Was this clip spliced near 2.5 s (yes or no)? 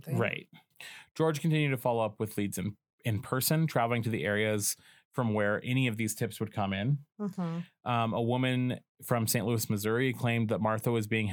no